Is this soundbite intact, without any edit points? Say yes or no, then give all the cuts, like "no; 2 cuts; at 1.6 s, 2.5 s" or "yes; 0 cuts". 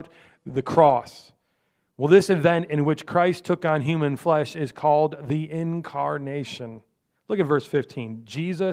no; 1 cut; at 7.1 s